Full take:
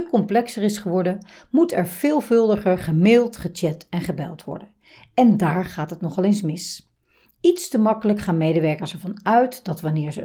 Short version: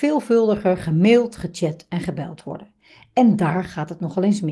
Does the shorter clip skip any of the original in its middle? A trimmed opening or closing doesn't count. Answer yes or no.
no